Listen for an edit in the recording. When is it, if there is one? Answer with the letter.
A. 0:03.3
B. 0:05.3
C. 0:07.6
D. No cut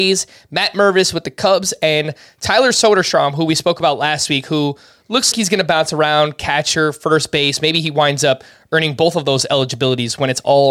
B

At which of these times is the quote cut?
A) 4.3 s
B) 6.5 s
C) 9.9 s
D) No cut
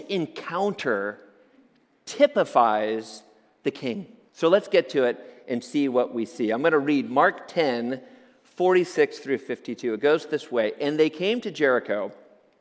A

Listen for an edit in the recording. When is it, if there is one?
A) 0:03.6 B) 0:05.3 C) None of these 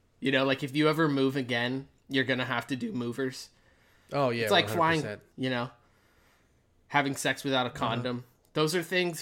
B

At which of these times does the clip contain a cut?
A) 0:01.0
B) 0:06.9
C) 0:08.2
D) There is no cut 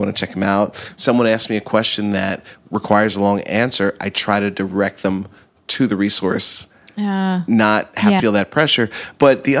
C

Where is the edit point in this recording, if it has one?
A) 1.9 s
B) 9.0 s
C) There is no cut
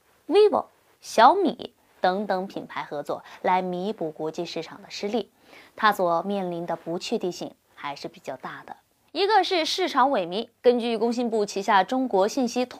C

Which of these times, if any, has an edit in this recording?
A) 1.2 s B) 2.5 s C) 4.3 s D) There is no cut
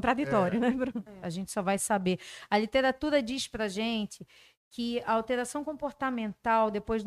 A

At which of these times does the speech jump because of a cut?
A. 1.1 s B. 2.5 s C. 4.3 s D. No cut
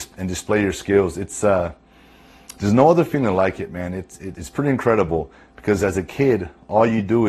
C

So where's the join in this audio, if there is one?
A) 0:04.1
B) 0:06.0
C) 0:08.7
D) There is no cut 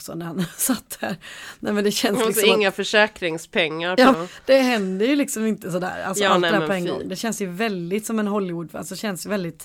A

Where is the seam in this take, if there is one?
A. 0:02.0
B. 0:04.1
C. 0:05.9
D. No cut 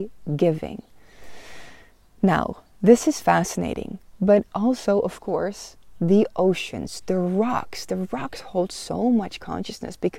C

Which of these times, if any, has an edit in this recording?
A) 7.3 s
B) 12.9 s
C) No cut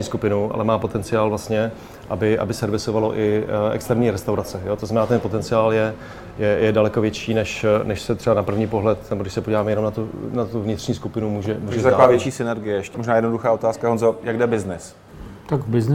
B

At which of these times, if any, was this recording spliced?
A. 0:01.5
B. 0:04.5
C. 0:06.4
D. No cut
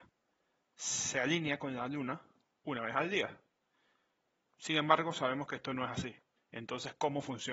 C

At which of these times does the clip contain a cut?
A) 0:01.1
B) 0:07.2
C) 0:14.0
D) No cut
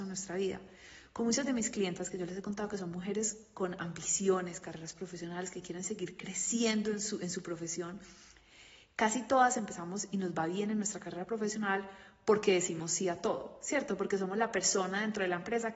D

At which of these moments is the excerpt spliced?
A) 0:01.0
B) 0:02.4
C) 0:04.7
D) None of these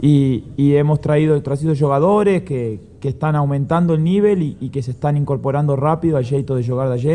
D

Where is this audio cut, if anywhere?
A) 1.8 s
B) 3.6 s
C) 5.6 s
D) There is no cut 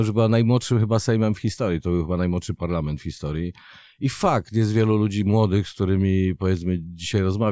D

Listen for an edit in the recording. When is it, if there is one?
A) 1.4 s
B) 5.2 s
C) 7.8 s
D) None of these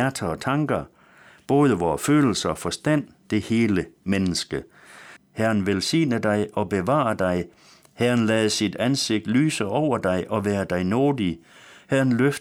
B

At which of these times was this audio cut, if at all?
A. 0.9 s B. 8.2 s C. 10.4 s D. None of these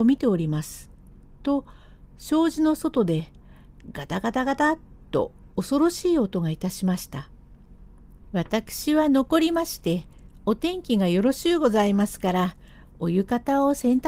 B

